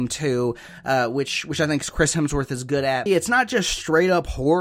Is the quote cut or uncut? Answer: cut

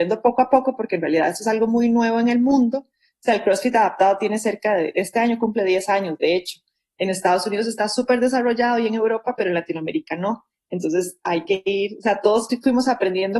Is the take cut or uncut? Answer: uncut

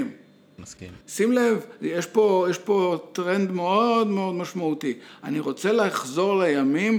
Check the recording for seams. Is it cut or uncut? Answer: uncut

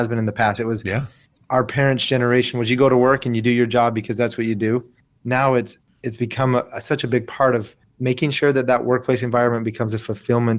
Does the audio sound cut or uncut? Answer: uncut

